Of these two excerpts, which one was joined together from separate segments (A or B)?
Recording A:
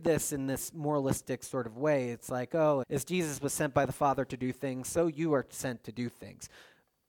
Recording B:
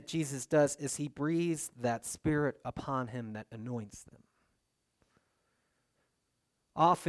A